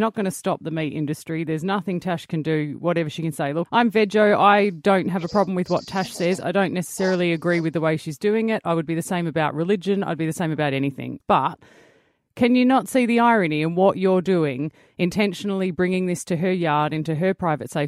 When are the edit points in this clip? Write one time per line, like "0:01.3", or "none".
0:03.6
0:11.2